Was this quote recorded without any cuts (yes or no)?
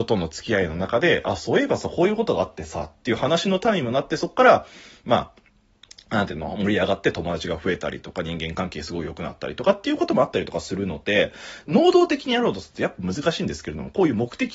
no